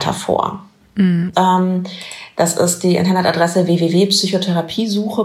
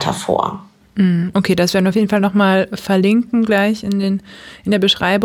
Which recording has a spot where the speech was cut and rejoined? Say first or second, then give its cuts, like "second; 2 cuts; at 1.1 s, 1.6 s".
first; 1 cut; at 1.3 s